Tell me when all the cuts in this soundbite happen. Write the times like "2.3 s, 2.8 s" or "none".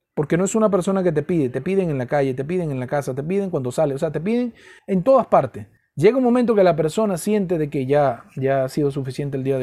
none